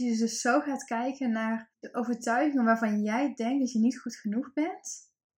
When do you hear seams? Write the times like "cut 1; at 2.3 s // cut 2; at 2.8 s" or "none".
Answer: cut 1; at 1.7 s